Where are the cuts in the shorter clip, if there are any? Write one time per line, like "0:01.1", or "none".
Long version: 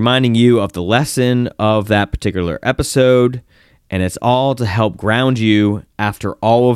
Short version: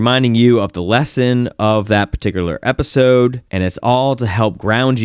0:03.5